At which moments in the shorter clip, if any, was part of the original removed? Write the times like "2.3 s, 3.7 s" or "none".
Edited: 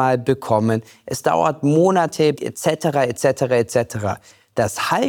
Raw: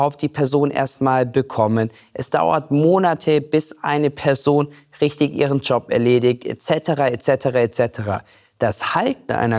2.3 s